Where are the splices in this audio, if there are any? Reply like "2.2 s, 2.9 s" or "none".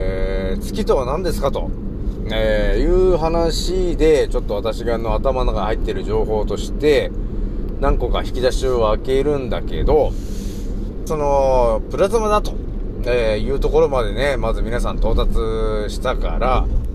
11.1 s